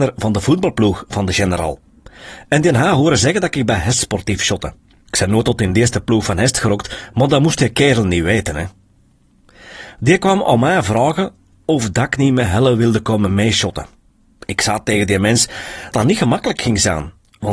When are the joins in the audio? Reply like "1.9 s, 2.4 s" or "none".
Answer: 15.9 s